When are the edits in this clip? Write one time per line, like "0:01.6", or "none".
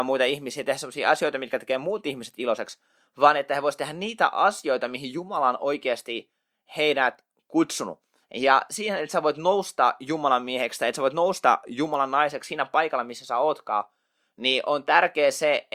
0:08.2